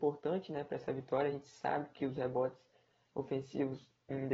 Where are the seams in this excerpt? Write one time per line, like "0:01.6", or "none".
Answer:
none